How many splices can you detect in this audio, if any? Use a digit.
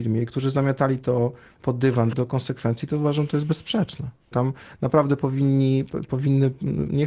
2